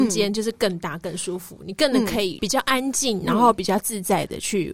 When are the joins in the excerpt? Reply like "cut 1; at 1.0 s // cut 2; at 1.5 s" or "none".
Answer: none